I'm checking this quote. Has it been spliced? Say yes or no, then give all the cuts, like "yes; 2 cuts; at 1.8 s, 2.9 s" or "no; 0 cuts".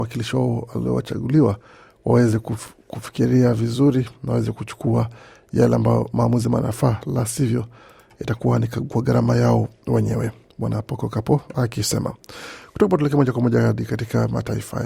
no; 0 cuts